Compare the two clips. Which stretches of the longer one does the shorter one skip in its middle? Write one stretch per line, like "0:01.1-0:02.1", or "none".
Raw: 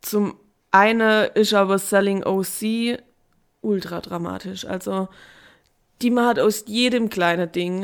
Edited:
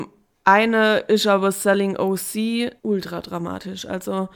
0:03.0-0:03.6